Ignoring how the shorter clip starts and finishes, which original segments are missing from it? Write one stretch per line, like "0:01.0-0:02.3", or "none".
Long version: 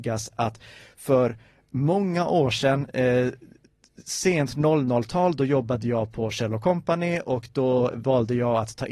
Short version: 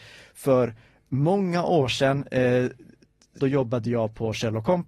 0:04.0-0:05.4